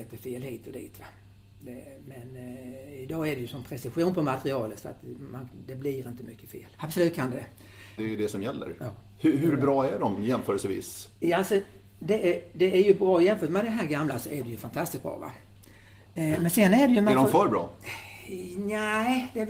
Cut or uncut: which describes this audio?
cut